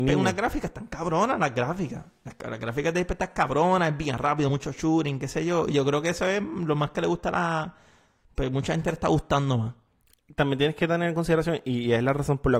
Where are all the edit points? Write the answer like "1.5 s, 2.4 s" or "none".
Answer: none

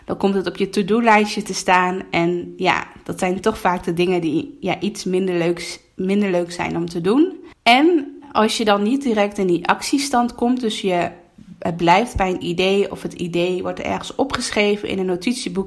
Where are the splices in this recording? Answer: 7.5 s

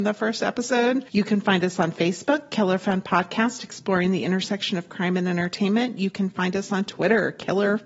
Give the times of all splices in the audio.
1.1 s

